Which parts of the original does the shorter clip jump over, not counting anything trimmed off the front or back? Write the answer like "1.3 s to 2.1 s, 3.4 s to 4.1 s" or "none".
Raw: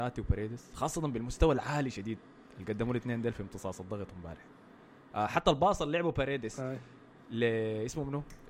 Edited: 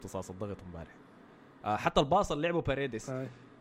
none